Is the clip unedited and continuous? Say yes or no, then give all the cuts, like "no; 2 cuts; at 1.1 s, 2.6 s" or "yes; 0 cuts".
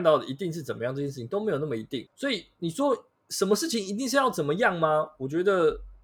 no; 1 cut; at 2.1 s